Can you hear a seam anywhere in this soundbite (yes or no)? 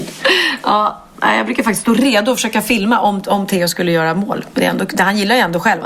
no